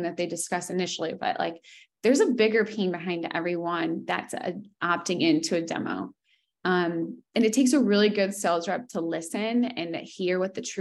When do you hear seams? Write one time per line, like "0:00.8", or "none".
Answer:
none